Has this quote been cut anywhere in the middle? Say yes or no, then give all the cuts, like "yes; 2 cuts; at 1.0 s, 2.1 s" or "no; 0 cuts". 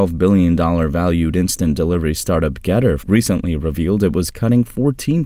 yes; 1 cut; at 3.0 s